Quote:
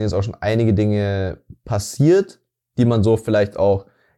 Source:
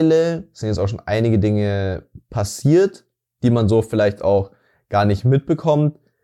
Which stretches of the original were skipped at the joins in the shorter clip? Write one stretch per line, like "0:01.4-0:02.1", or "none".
none